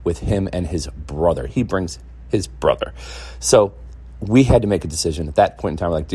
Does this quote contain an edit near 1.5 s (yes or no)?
yes